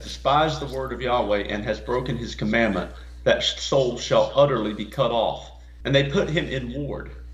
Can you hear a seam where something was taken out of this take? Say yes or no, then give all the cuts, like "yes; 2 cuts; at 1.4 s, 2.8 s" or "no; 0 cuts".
yes; 1 cut; at 5.8 s